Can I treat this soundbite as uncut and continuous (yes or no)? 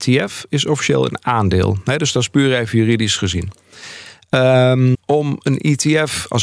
no